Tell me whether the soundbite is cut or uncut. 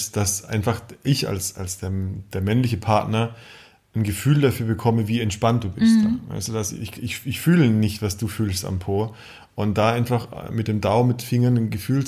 uncut